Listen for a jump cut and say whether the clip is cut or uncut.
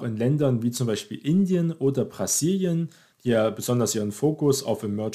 cut